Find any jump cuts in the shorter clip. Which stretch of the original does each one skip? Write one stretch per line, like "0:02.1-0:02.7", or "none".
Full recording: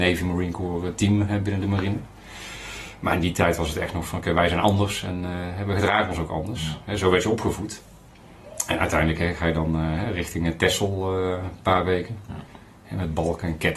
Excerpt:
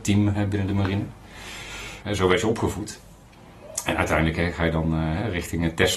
0:03.0-0:06.8